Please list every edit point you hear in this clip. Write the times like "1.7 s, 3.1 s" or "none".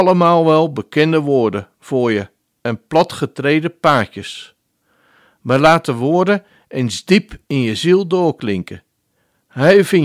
none